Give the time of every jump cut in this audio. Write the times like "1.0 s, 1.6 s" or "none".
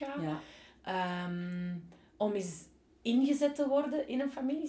none